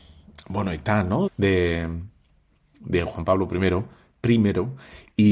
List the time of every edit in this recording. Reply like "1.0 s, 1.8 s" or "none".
1.3 s